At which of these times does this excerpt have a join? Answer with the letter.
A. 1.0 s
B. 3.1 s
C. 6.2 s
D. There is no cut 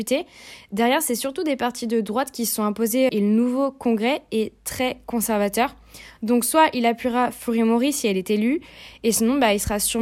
B